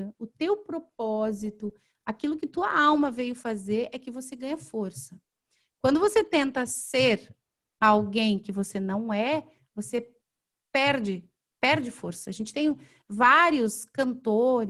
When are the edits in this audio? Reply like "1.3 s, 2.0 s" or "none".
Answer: none

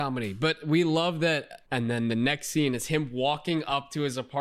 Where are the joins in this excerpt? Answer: 1.6 s

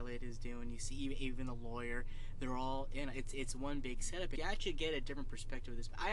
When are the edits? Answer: 4.4 s

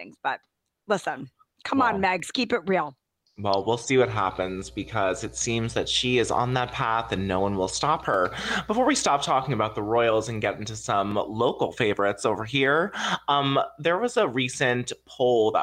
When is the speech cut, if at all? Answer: none

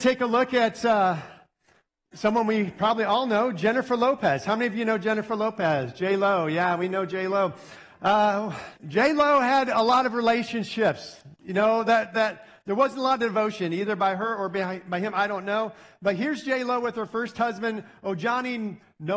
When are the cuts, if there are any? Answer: 8.8 s

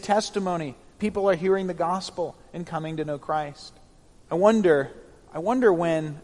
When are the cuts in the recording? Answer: 4.1 s

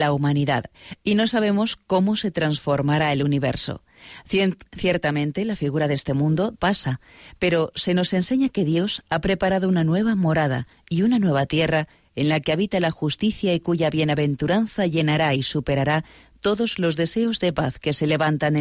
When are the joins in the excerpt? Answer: 6.5 s

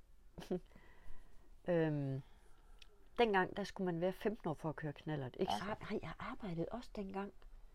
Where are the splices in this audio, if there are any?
5.6 s

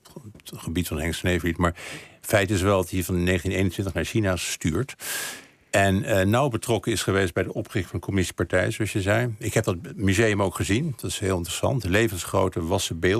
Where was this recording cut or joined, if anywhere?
none

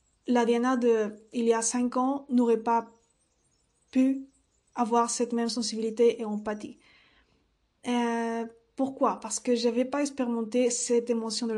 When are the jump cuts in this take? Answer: none

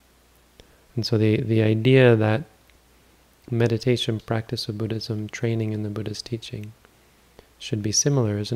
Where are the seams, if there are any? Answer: 4.2 s

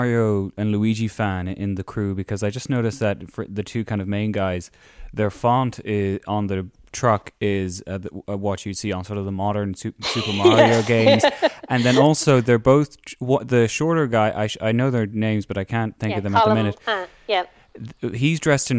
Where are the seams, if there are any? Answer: none

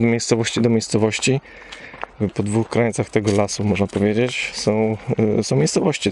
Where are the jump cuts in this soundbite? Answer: none

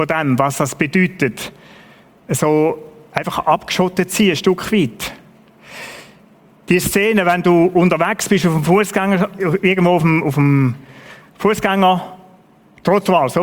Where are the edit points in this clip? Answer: none

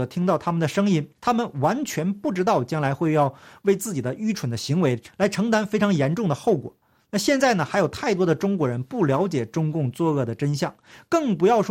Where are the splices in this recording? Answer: 1.2 s

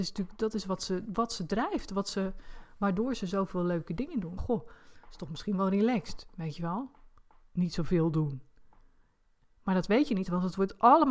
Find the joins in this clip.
4.4 s

